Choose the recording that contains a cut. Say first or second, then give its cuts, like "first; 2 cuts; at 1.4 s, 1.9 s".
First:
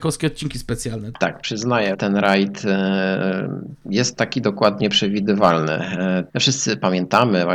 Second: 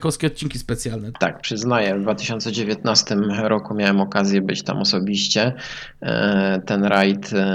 first; 3 cuts; at 1.9 s, 4.8 s, 6.3 s